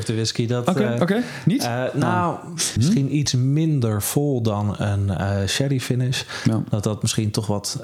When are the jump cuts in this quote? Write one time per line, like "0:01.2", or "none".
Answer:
0:02.8